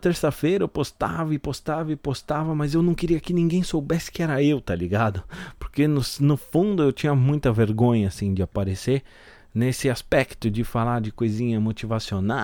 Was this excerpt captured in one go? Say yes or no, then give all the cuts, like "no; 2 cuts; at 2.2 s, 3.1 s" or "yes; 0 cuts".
yes; 0 cuts